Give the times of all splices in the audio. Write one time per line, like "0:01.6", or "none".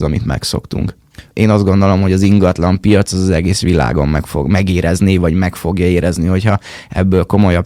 0:01.3

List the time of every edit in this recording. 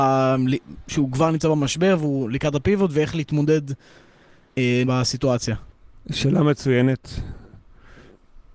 0:04.8

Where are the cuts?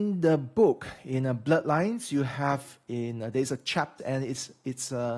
0:04.0

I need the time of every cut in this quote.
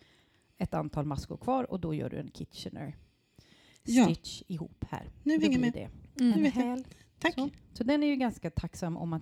none

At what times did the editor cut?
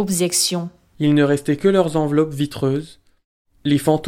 0:00.9

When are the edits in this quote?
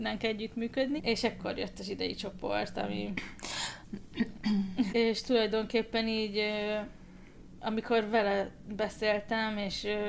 0:01.0
0:04.9

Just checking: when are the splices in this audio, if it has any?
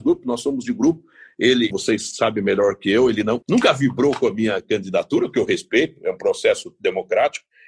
0:01.7
0:03.4

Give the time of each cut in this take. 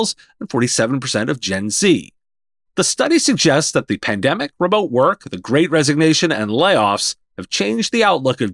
none

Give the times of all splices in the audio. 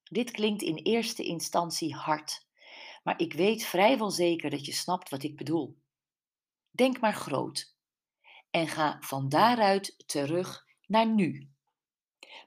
0:06.5

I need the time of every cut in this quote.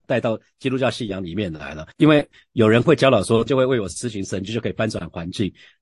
0:01.9
0:03.5

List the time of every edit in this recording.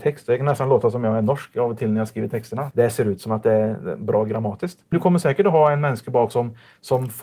0:02.7
0:04.9

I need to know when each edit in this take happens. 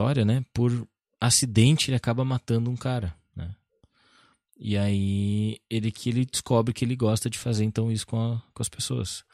none

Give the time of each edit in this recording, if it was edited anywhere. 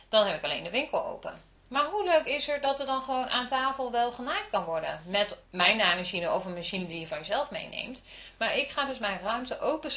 0:05.4

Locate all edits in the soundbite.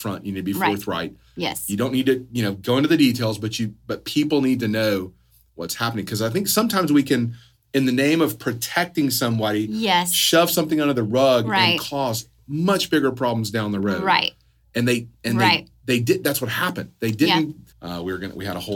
0:17.7

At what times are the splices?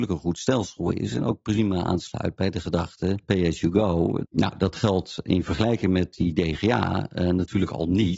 0:04.2

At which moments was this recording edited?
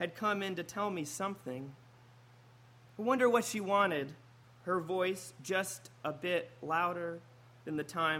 0:04.4

